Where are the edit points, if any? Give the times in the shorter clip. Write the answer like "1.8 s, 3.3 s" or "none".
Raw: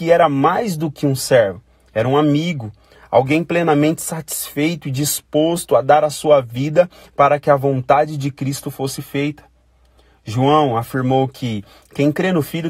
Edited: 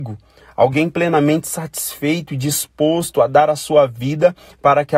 none

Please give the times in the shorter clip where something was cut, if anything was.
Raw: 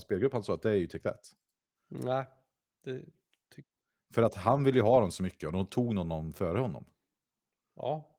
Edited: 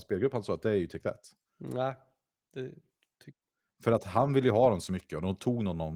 1.5 s

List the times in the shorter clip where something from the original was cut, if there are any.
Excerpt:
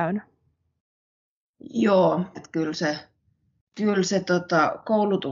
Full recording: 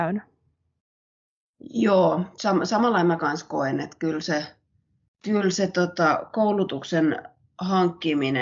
2.3 s

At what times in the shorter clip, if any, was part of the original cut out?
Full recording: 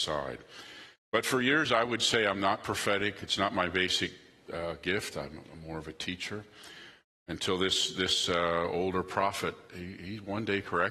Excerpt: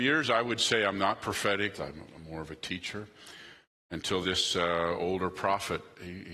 1.7 s, 4.2 s

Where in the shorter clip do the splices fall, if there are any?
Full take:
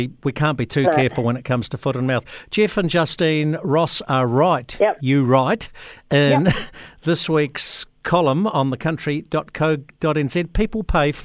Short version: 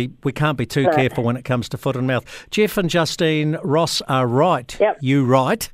none

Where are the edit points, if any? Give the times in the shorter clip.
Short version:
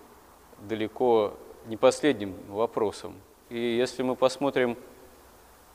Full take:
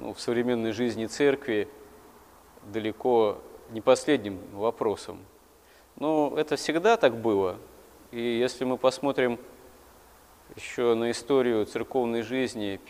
3.4 s

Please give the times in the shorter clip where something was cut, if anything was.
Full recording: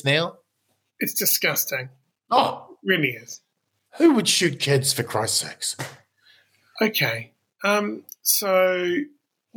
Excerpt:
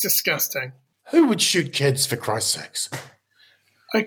0.9 s

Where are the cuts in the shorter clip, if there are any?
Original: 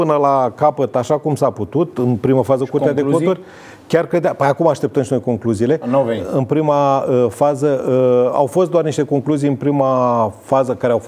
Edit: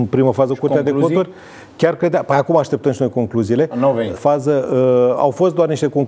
4.2 s

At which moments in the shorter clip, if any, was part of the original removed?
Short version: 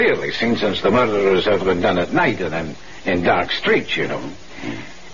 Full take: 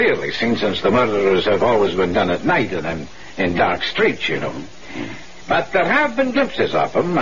1.6 s

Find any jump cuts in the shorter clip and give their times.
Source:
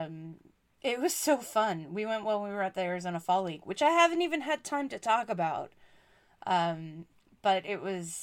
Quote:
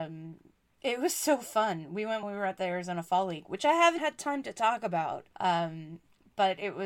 2.2 s, 4.0 s, 5.3 s

